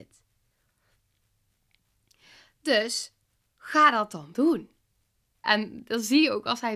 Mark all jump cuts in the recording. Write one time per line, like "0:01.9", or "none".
0:05.4